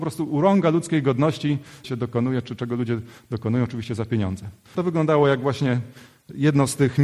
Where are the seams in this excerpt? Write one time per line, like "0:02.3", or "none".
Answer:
0:01.8
0:04.7